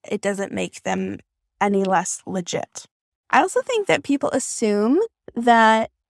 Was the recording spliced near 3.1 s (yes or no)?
yes